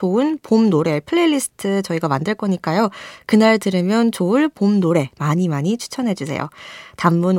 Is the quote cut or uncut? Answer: uncut